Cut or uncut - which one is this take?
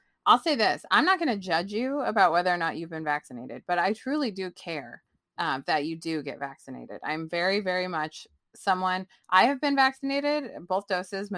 uncut